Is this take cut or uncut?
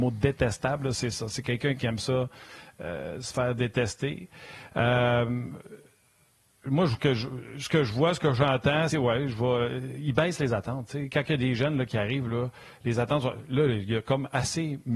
cut